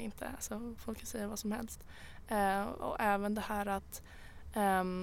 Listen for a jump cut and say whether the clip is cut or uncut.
uncut